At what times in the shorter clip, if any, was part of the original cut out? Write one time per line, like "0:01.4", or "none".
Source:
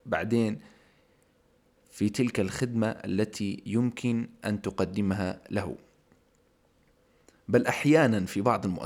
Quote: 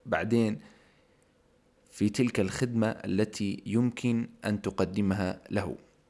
none